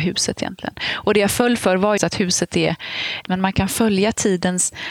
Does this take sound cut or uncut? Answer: cut